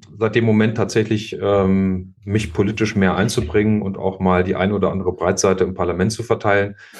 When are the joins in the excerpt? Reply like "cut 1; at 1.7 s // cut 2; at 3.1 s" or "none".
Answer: none